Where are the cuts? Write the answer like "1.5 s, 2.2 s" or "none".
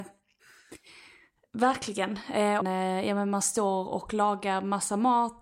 2.6 s